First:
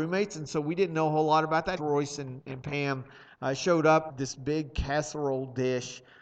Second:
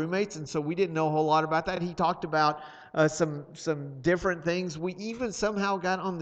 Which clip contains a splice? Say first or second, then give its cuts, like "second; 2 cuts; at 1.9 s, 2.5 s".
first; 2 cuts; at 1.8 s, 4.1 s